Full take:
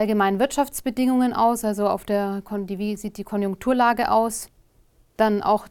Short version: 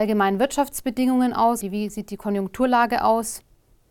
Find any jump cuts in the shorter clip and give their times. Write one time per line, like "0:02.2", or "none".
0:01.6

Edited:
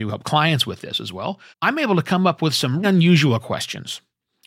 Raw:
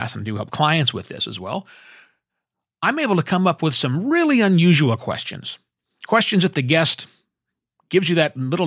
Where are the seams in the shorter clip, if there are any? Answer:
0:01.5
0:02.8

